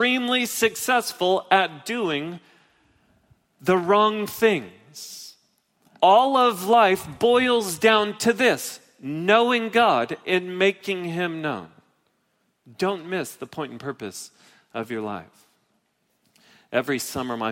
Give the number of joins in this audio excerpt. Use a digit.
0